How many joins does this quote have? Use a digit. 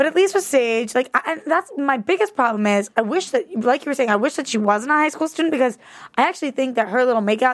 0